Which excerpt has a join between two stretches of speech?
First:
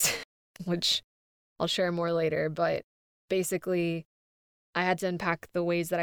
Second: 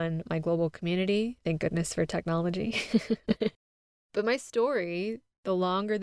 second; 1 cut; at 3.4 s

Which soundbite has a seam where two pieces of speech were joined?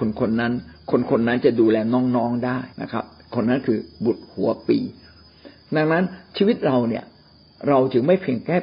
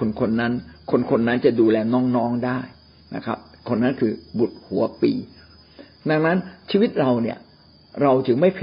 first; 1 cut; at 2.7 s

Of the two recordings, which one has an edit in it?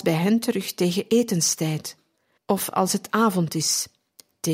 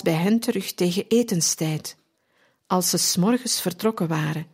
first; 1 cut; at 2.4 s

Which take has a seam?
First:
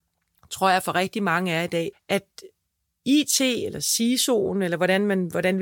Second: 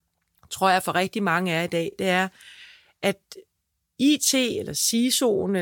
first; 1 cut; at 1.9 s

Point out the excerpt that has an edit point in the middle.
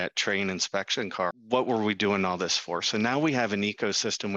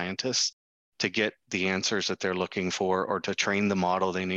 first; 1 cut; at 1.3 s

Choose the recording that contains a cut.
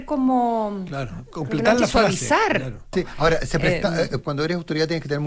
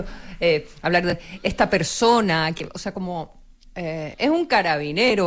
first; 2 cuts; at 2.9 s, 4.2 s

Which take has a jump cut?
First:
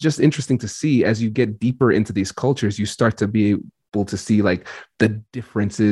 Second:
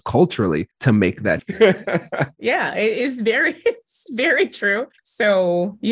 second; 2 cuts; at 1.4 s, 5.0 s

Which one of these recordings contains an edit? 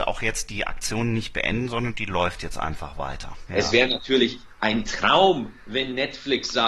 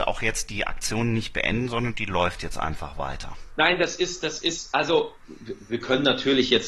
first; 1 cut; at 3.5 s

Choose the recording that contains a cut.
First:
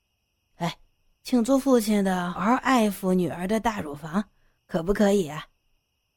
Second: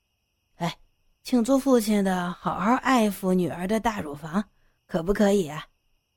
first; 1 cut; at 2.3 s

